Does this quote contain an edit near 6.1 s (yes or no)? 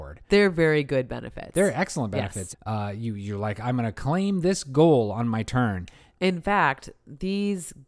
yes